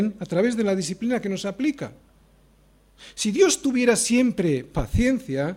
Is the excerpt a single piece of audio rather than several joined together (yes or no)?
yes